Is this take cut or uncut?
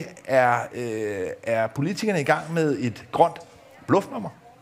uncut